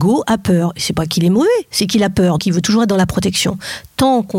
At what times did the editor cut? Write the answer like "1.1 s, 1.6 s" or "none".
2.4 s